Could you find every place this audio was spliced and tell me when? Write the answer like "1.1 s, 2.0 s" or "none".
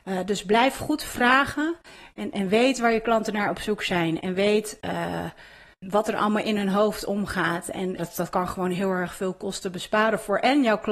5.8 s, 8.0 s

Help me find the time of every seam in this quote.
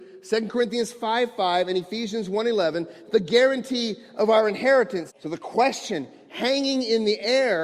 3.1 s, 5.1 s

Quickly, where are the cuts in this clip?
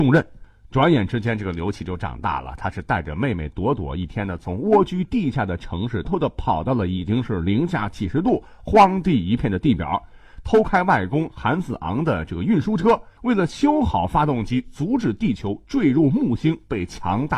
6.0 s, 13.2 s

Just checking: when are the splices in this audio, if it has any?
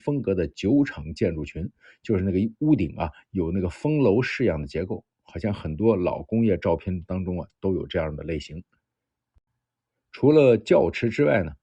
none

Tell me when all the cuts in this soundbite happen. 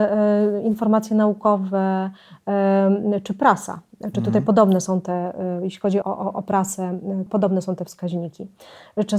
6.0 s, 7.3 s

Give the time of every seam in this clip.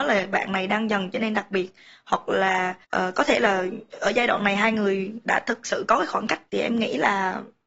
2.8 s

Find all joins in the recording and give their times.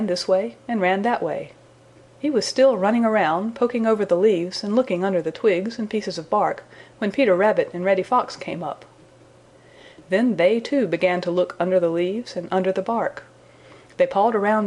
none

